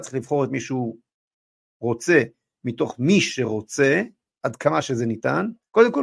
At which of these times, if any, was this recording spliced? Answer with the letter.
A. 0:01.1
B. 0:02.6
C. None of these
C